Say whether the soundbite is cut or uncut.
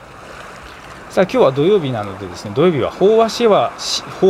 uncut